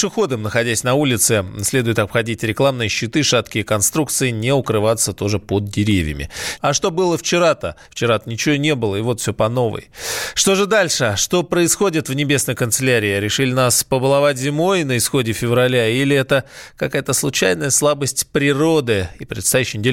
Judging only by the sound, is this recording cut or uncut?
cut